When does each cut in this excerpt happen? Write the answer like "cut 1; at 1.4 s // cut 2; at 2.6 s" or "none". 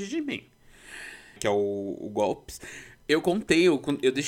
cut 1; at 1.4 s